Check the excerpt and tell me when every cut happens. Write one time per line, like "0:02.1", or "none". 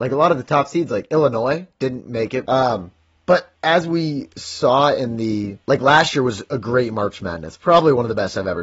0:02.4
0:03.5
0:05.6